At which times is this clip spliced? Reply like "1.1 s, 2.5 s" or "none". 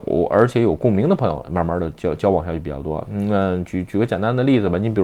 none